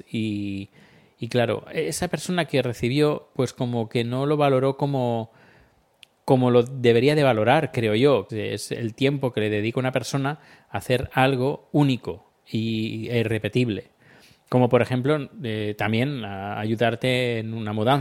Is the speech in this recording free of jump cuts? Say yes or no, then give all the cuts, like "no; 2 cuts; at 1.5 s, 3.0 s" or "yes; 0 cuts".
no; 1 cut; at 8.3 s